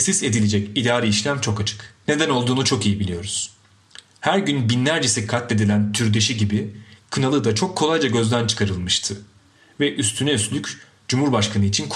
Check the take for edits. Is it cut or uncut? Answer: cut